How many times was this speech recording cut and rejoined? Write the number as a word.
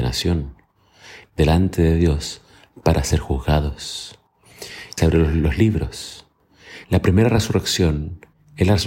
three